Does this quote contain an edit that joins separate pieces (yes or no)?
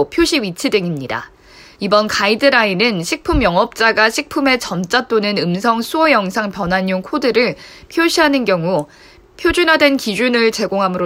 yes